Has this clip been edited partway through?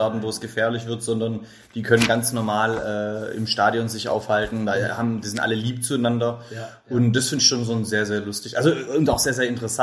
no; 0 cuts

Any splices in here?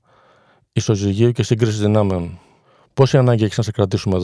no; 0 cuts

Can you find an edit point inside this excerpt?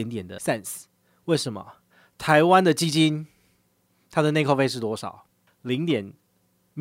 no; 0 cuts

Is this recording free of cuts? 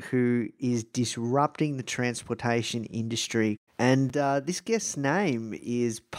no; 1 cut; at 3.7 s

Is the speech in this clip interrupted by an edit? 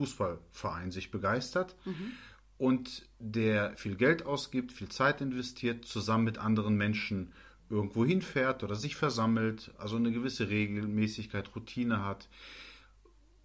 no; 0 cuts

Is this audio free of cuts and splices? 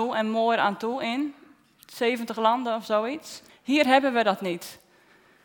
no; 1 cut; at 3.5 s

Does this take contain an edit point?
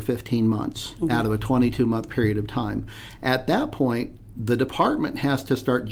no; 0 cuts

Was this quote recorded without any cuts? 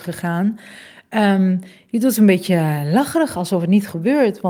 yes; 0 cuts

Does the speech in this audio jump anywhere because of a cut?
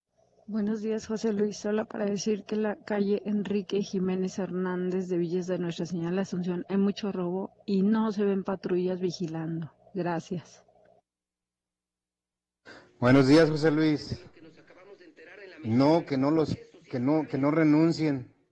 no; 0 cuts

